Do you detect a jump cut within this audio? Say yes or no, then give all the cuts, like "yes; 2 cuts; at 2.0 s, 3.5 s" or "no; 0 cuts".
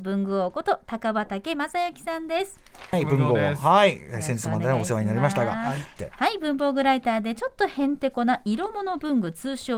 yes; 2 cuts; at 2.9 s, 6.0 s